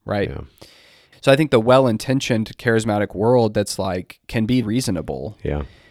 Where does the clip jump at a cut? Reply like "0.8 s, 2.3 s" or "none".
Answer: 1.1 s, 4.6 s

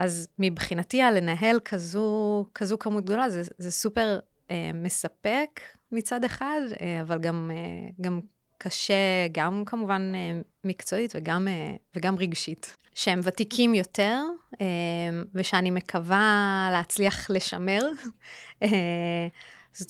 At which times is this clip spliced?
12.8 s

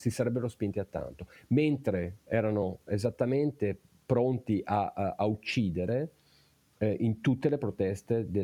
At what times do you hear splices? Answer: none

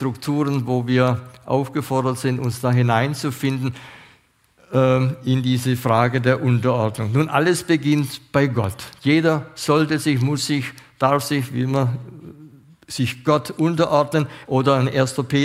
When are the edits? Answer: 14.5 s

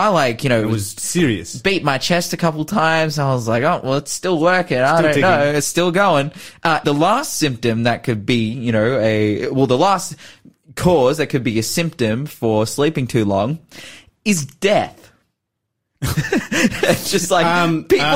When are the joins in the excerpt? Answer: 6.8 s

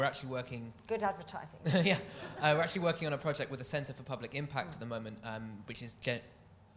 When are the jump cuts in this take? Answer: none

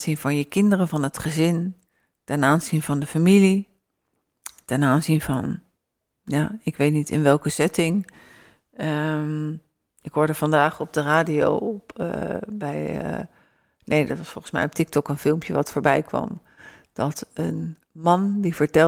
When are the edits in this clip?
none

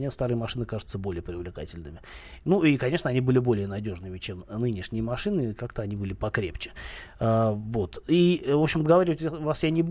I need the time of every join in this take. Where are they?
none

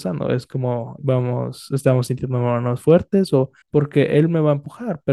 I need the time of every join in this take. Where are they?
1.0 s, 3.6 s

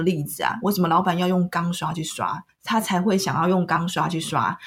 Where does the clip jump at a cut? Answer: 2.5 s

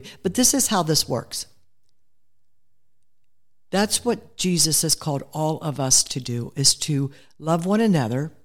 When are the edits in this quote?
none

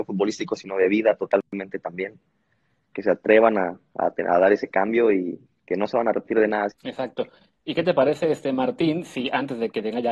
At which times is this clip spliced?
6.7 s

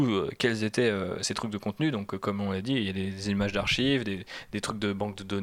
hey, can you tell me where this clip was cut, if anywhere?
none

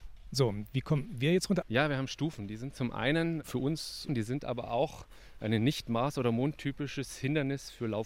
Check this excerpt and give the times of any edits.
1.6 s, 4.1 s

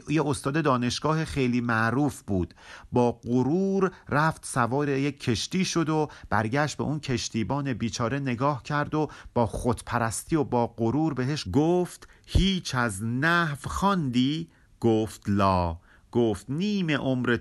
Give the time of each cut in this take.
11.5 s

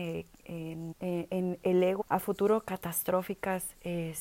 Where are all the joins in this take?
0.9 s, 2.0 s

